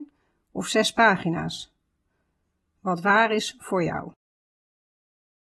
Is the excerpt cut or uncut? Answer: uncut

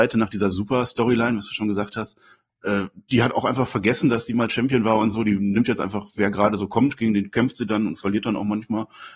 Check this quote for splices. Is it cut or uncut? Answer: uncut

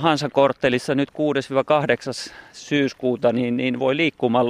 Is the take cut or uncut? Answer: uncut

